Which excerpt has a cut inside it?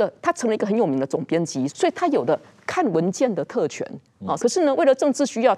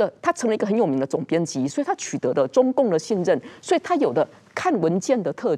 first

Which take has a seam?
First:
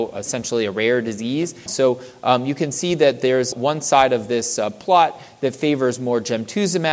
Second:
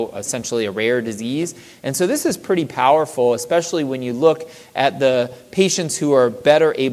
first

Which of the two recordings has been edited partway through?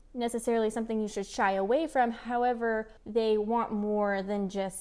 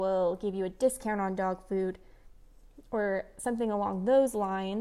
first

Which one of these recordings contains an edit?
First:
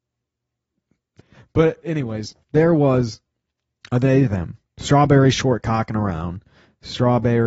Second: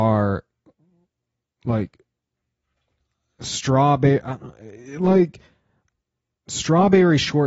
first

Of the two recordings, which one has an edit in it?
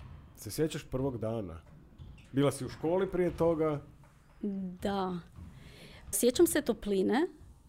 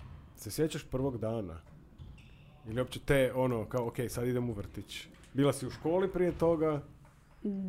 first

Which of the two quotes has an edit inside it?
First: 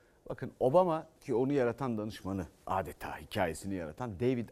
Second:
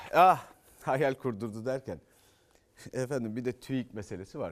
first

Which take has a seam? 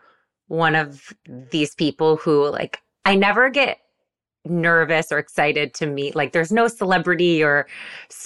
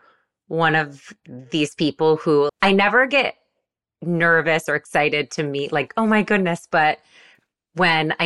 second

